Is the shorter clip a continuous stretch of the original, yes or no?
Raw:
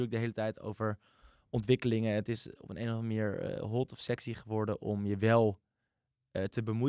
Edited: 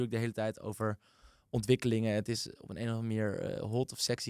yes